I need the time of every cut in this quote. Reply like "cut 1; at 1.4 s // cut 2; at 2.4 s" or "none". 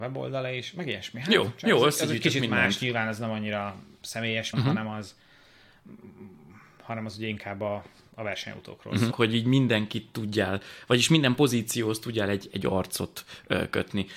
cut 1; at 4.5 s // cut 2; at 9.1 s

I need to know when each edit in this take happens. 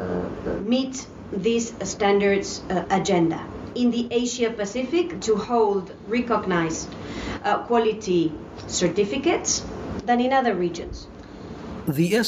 cut 1; at 5.2 s

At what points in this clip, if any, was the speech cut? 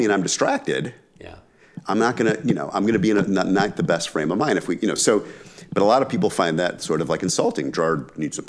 none

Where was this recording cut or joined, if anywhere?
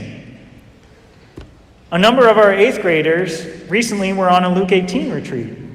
none

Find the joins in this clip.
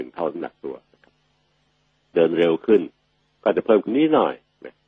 cut 1; at 3.9 s

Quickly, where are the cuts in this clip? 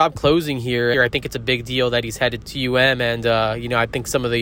cut 1; at 0.9 s // cut 2; at 2.4 s

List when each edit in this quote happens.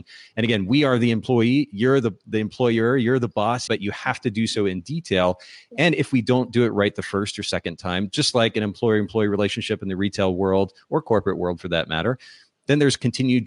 cut 1; at 3.7 s

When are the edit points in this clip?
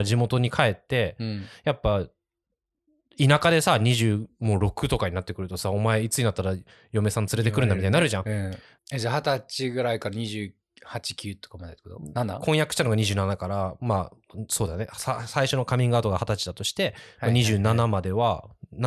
cut 1; at 8.8 s

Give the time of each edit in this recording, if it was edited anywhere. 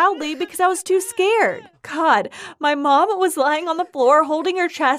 cut 1; at 1.7 s

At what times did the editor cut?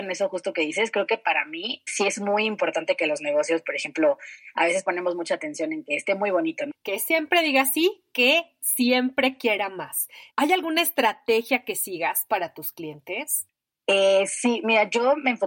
cut 1; at 1.9 s // cut 2; at 6.7 s // cut 3; at 10.3 s

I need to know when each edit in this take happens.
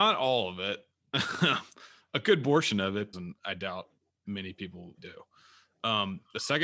cut 1; at 3.1 s // cut 2; at 5.0 s

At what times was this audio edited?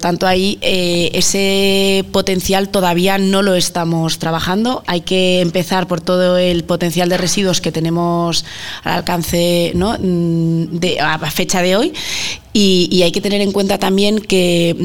none

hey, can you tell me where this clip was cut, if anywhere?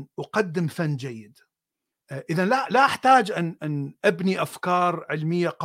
cut 1; at 1.9 s

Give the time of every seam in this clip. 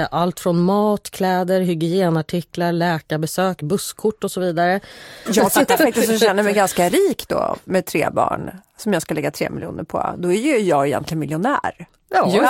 cut 1; at 5.3 s

